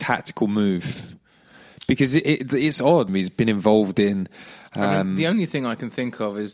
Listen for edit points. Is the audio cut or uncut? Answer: cut